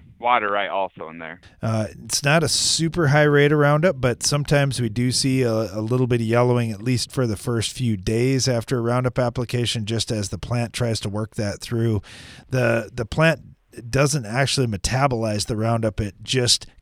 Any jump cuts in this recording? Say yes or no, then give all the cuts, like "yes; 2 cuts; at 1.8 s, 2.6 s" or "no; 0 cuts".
yes; 1 cut; at 1.4 s